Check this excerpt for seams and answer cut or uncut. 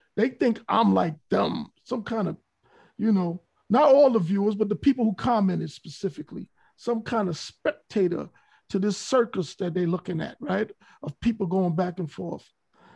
uncut